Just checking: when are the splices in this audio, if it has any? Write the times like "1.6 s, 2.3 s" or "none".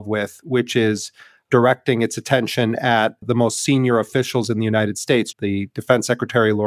3.2 s, 5.3 s